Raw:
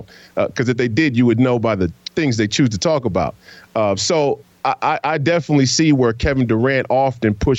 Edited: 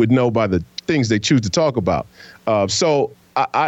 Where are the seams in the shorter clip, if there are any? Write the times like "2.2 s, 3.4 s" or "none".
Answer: none

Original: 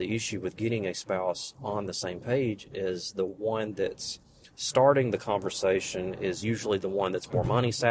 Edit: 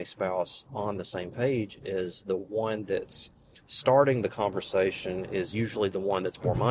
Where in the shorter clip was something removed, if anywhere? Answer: none

